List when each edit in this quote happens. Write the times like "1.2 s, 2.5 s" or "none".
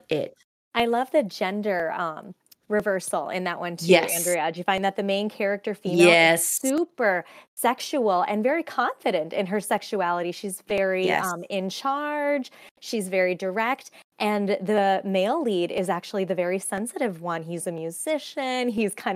none

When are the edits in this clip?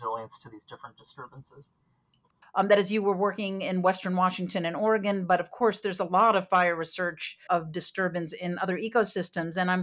2.4 s, 7.5 s

